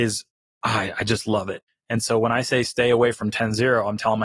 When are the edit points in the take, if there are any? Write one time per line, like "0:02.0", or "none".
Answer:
0:01.7